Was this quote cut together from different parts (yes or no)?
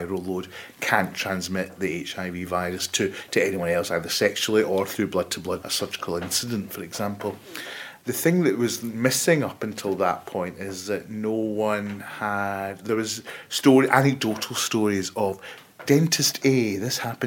yes